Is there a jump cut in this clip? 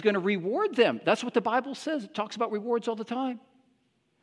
no; 0 cuts

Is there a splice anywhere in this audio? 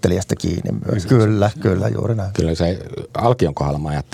yes; 2 cuts; at 1.0 s, 2.3 s

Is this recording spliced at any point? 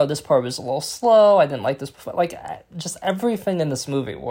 no; 0 cuts

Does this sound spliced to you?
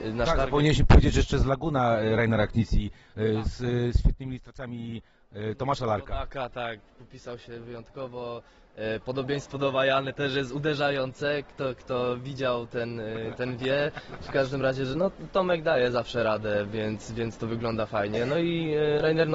no; 0 cuts

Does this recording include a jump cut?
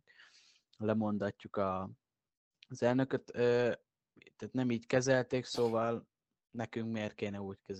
no; 0 cuts

